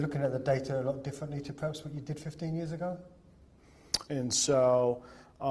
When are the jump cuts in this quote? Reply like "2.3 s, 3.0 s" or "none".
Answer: 4.1 s